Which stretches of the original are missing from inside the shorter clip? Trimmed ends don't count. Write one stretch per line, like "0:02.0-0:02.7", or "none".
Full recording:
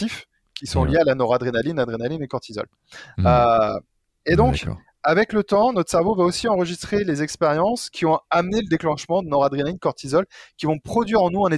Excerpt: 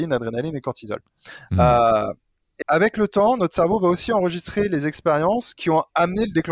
0:04.3-0:05.0